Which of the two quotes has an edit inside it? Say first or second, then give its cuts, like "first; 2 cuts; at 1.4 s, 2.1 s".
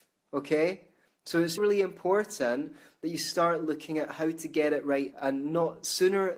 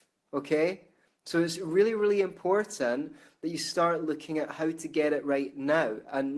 first; 2 cuts; at 1.6 s, 5.1 s